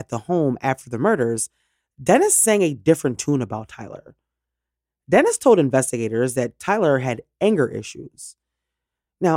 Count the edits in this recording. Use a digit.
0